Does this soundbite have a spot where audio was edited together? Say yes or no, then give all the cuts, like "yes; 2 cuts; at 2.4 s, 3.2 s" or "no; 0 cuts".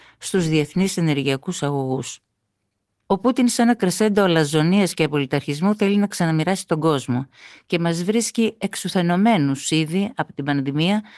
no; 0 cuts